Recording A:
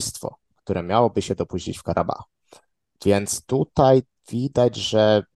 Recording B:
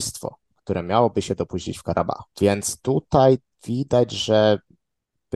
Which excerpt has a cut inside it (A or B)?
B